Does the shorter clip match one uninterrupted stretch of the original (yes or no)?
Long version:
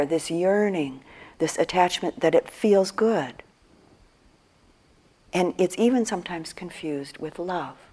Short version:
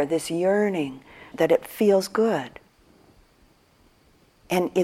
no